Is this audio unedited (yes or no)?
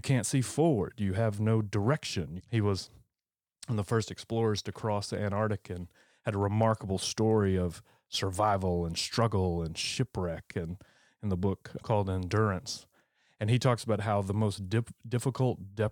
no